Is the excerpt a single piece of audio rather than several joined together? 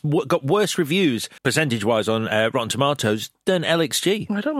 no; 1 cut; at 1.4 s

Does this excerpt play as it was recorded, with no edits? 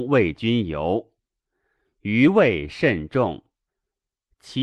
yes; 0 cuts

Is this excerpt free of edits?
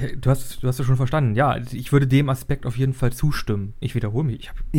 no; 1 cut; at 3.8 s

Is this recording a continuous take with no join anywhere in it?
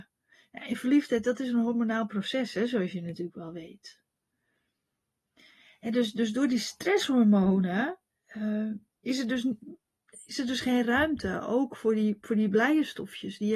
yes; 0 cuts

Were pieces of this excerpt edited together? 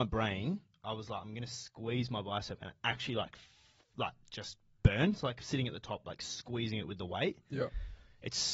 no; 0 cuts

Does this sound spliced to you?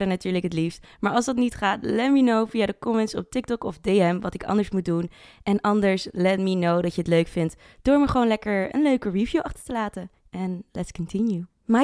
no; 0 cuts

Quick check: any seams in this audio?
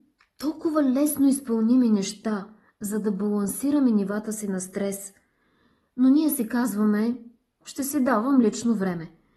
yes; 1 cut; at 7.6 s

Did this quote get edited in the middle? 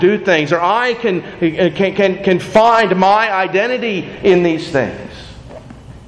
no; 0 cuts

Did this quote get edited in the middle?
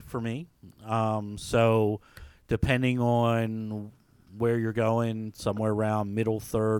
no; 0 cuts

